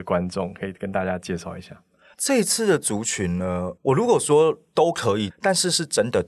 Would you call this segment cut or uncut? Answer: cut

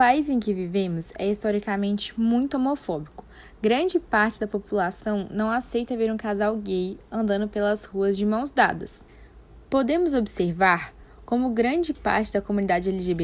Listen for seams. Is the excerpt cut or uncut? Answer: uncut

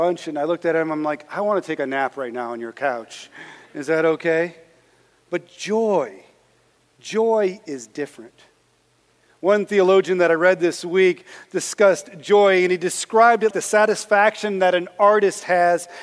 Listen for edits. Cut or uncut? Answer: cut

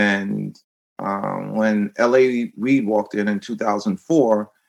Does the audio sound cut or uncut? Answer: uncut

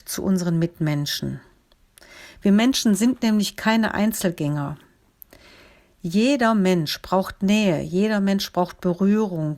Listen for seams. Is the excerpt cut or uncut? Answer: uncut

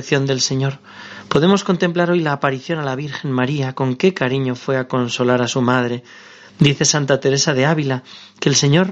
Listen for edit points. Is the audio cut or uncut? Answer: uncut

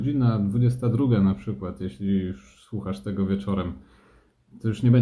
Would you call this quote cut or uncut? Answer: uncut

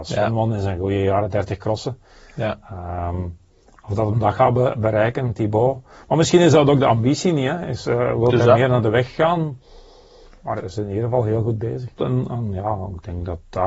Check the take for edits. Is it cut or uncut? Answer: cut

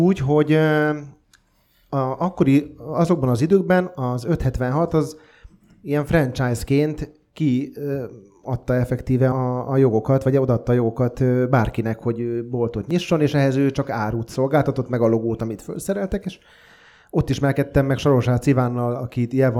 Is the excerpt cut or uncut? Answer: cut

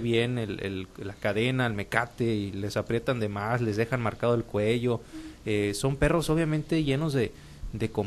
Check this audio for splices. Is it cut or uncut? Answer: uncut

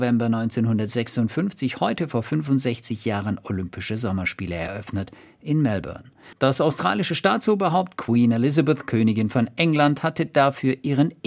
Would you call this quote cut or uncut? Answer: uncut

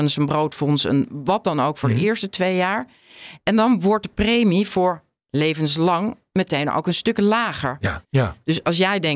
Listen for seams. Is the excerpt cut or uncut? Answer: cut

